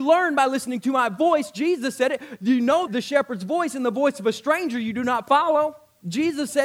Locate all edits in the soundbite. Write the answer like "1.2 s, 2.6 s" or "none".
2.9 s